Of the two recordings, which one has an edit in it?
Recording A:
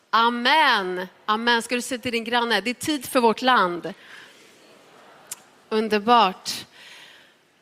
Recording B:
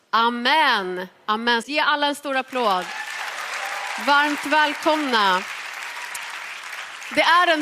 B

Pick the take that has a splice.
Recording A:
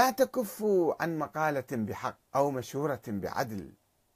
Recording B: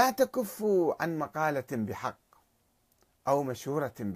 A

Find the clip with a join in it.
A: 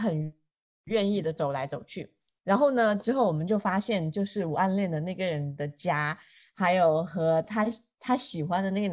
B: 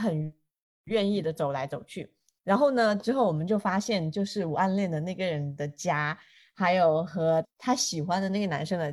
B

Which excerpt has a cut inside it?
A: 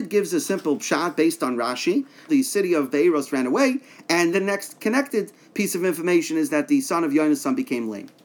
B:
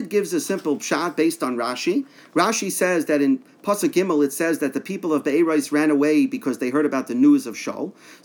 A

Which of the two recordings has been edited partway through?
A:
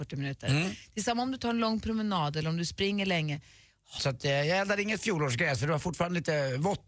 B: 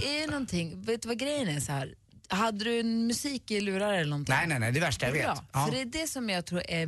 A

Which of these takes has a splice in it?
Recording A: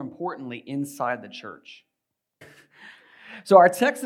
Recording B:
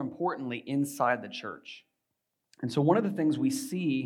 A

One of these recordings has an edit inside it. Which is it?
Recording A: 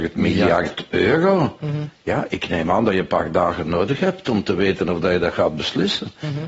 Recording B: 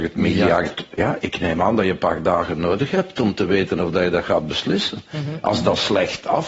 B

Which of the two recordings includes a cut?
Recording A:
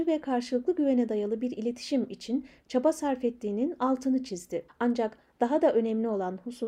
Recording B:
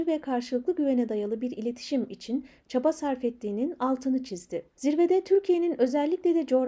A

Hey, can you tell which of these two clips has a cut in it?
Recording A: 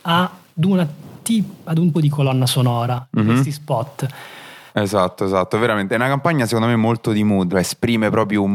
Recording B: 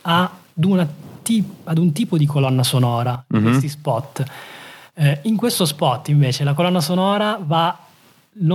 A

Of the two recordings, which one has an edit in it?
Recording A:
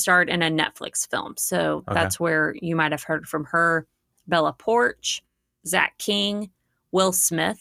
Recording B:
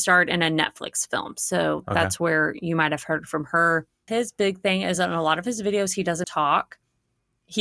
B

